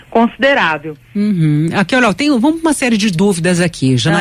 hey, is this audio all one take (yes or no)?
yes